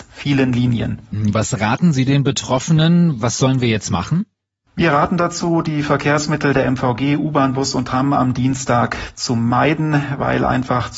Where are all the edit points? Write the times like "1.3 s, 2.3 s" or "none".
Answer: none